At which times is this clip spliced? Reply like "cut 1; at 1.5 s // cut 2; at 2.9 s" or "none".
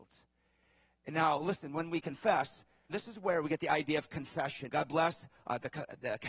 cut 1; at 2.9 s // cut 2; at 4.7 s